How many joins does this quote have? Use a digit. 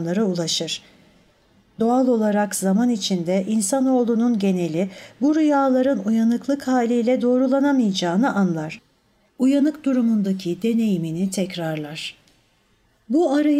1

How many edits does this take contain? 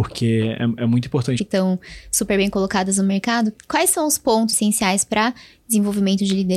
2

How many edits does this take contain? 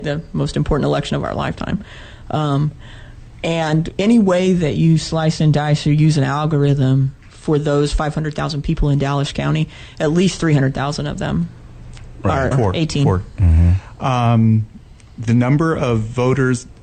1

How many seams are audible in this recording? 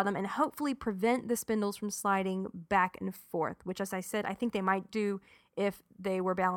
0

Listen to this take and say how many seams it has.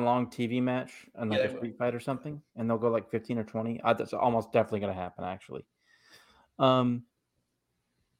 0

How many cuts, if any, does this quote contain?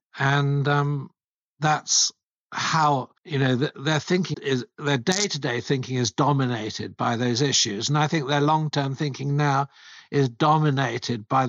2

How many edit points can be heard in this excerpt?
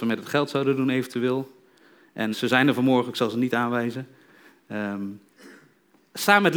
1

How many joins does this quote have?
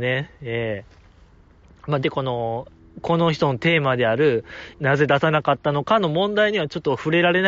2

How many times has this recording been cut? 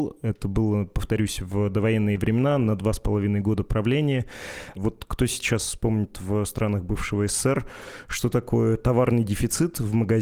1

